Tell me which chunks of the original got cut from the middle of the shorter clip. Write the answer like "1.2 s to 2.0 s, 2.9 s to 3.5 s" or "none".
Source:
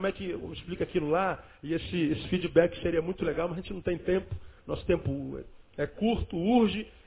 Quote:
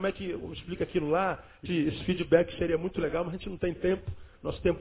1.7 s to 1.9 s